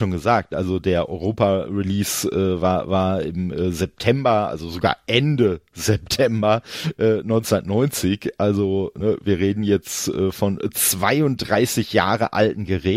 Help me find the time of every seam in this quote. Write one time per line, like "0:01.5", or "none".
none

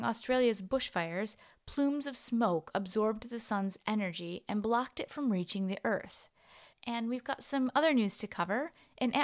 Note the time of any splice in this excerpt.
0:06.7

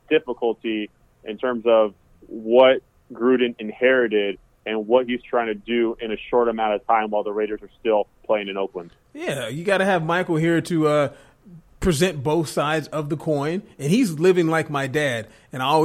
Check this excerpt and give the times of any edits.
none

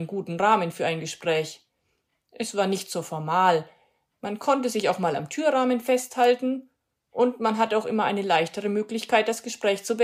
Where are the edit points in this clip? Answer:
none

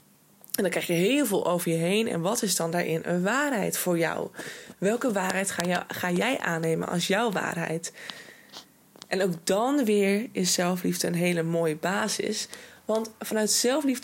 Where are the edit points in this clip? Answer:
none

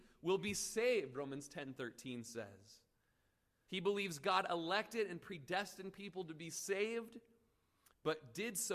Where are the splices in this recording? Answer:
0:03.7

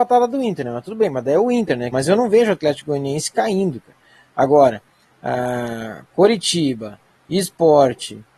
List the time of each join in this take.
0:01.9

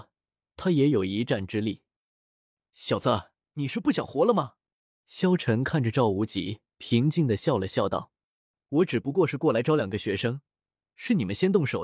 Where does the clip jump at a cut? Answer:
0:03.4
0:05.0
0:06.7

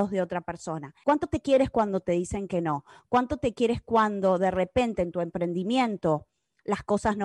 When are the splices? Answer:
0:01.0

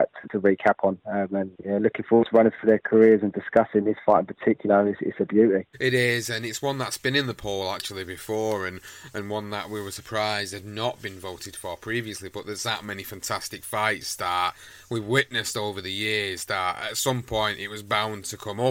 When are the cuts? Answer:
none

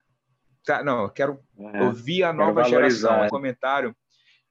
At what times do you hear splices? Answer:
0:01.5
0:03.3

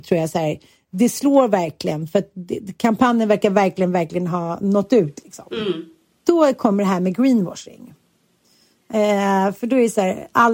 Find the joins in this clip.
none

